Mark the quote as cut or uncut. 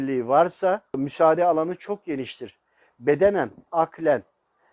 cut